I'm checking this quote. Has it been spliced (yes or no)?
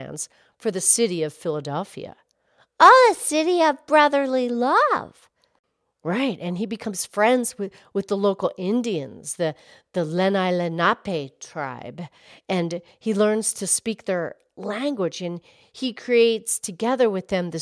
no